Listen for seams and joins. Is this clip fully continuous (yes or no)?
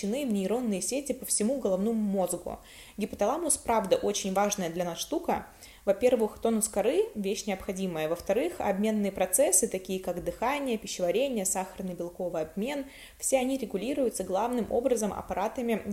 yes